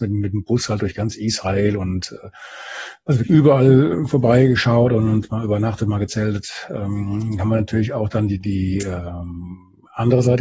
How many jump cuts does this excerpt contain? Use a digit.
1